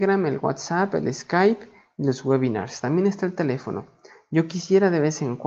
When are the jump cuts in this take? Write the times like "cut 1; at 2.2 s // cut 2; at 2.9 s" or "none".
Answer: none